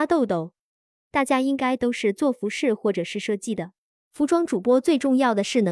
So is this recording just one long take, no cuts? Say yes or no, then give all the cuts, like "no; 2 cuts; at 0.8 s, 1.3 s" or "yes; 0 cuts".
no; 1 cut; at 3.9 s